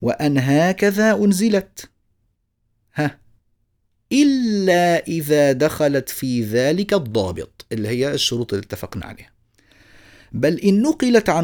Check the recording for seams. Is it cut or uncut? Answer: uncut